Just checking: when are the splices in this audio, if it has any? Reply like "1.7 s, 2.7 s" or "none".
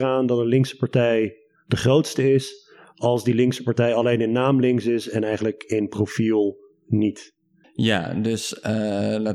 7.6 s